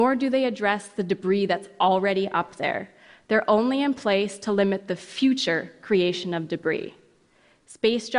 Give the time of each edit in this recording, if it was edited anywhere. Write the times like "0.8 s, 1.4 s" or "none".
none